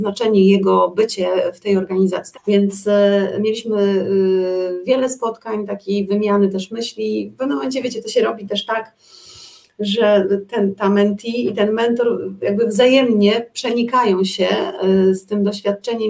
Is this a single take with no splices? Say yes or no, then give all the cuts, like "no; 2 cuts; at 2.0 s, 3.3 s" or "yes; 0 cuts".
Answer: no; 1 cut; at 2.3 s